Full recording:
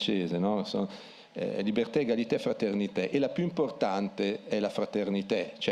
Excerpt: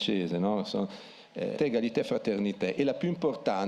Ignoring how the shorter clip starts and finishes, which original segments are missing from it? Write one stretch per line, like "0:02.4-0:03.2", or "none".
0:01.6-0:01.9